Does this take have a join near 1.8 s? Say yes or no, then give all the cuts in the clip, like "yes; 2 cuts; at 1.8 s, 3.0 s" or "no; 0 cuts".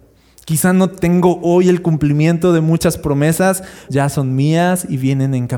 no; 1 cut; at 3.9 s